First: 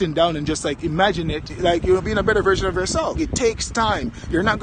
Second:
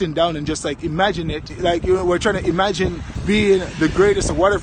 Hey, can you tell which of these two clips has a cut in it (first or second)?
first